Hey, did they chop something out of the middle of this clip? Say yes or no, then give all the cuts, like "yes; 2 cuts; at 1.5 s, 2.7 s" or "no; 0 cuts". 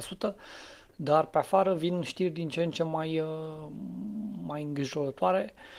no; 0 cuts